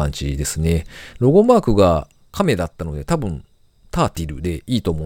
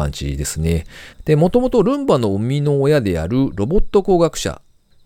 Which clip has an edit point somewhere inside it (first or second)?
second